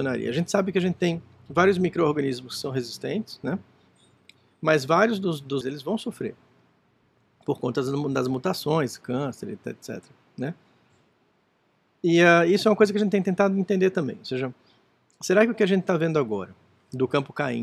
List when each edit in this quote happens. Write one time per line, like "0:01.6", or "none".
0:05.6